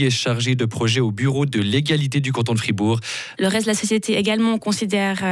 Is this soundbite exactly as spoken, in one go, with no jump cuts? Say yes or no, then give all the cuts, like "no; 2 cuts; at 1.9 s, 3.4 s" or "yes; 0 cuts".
no; 1 cut; at 3.3 s